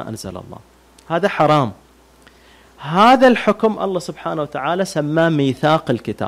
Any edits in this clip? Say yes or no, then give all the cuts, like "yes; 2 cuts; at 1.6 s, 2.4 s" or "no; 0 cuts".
no; 0 cuts